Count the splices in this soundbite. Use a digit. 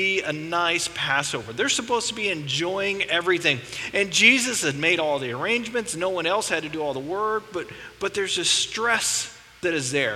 0